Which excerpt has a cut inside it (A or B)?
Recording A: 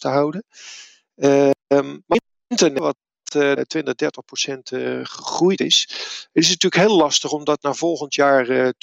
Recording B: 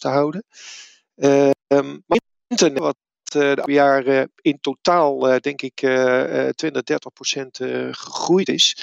A